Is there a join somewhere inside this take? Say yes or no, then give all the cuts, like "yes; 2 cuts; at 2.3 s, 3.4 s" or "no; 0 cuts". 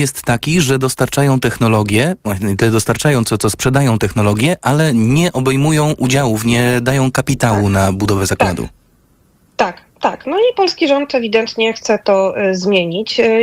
no; 0 cuts